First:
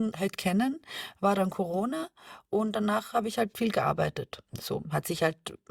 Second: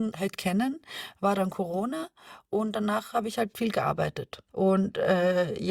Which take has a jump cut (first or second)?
second